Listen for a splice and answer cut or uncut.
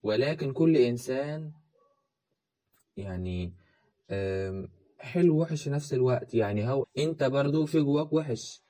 cut